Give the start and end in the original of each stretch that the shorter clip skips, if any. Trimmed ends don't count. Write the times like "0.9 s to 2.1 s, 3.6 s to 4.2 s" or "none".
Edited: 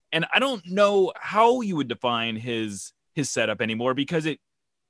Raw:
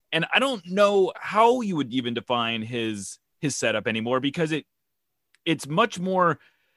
1.9 s to 2.1 s